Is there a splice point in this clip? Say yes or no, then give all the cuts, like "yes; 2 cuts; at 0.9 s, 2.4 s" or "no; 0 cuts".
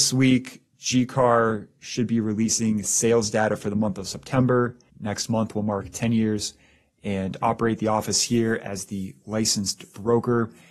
yes; 1 cut; at 4.9 s